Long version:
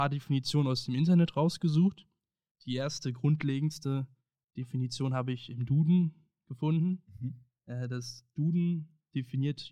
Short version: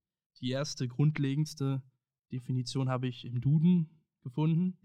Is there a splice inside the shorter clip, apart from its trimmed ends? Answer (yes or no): no